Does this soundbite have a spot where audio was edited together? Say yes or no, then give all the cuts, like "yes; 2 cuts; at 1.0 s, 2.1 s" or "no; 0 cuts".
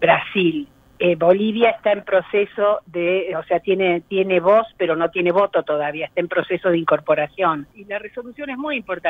yes; 1 cut; at 7.7 s